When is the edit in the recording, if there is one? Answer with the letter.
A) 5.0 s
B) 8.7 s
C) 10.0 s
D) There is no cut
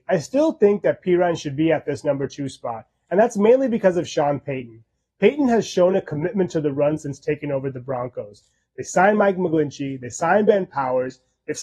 D